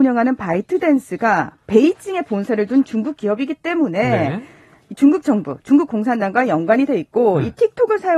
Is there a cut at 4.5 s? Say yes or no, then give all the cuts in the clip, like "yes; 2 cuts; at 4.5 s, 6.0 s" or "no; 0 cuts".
no; 0 cuts